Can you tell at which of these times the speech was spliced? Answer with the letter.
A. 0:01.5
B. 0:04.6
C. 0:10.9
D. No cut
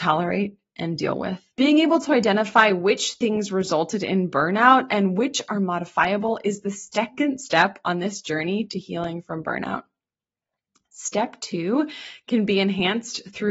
A